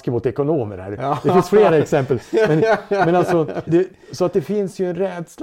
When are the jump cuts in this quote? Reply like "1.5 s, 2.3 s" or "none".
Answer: 3.7 s